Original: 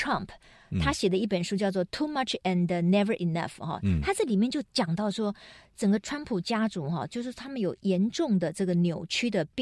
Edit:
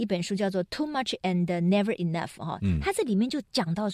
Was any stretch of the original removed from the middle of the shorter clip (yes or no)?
no